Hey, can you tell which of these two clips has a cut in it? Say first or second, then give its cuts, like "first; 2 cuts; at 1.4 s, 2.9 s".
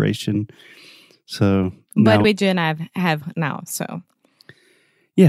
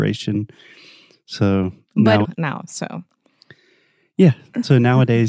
second; 1 cut; at 2.2 s